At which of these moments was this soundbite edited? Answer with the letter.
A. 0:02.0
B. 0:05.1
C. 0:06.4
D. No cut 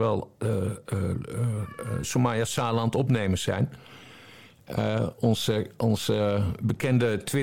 A